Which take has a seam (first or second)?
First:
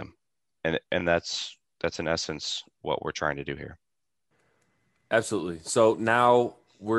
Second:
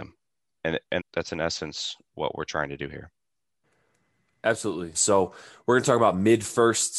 second